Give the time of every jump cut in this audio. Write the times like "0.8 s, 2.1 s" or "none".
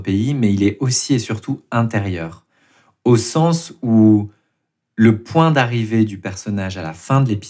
none